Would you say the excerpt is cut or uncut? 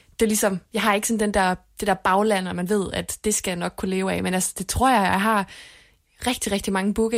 uncut